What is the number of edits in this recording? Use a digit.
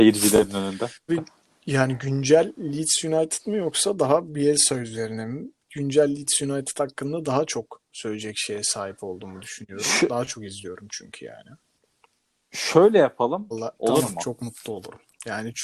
2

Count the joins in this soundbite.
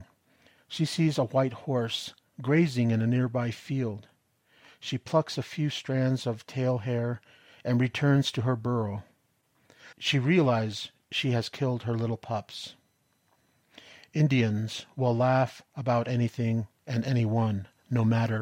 1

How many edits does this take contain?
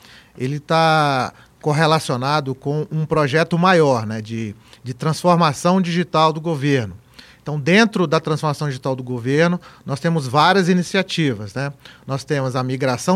0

